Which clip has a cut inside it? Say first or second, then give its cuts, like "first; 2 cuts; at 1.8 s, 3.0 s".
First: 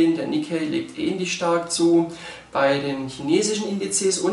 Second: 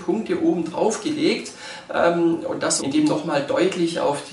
second; 1 cut; at 2.8 s